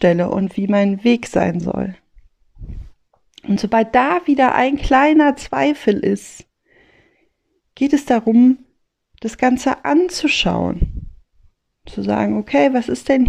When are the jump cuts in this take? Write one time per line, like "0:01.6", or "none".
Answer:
none